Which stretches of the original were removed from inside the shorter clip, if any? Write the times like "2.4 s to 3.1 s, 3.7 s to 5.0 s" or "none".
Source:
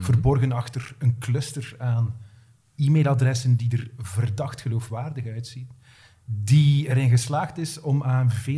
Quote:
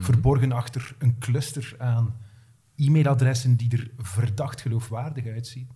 none